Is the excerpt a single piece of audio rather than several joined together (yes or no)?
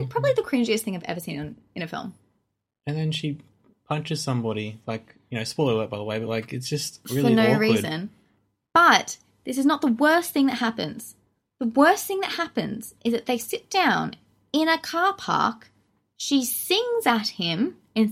yes